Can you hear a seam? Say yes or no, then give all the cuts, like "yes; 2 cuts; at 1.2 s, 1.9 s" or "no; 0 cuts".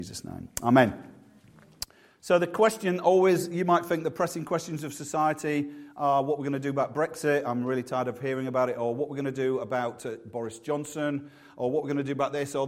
no; 0 cuts